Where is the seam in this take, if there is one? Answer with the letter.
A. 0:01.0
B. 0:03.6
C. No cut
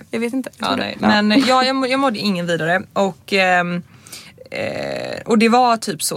A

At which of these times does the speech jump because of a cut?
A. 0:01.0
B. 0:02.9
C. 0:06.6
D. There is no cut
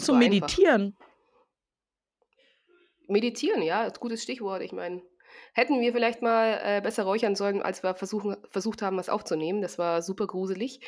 D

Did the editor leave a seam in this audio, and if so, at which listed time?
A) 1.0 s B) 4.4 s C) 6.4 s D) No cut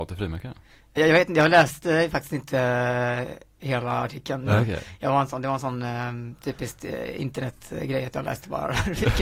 A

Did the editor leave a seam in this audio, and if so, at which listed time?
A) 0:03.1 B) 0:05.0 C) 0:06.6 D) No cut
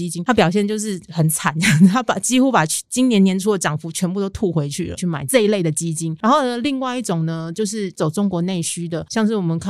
B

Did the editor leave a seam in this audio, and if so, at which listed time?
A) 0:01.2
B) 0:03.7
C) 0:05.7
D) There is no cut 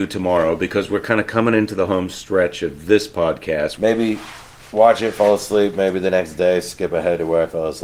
B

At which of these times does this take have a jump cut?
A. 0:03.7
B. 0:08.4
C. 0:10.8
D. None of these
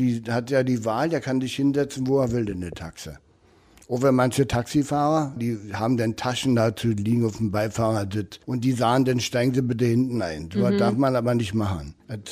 B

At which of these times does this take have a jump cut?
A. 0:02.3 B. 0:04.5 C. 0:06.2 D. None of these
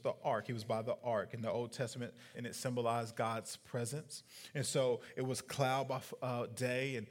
A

